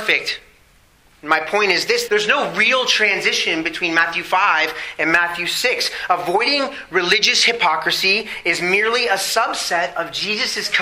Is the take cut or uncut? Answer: cut